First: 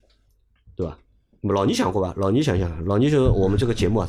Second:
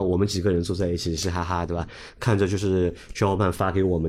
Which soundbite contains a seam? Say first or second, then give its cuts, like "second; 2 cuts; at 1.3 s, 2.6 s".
second; 1 cut; at 1.2 s